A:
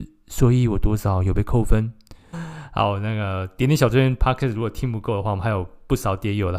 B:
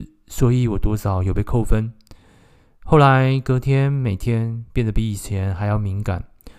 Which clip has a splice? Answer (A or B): A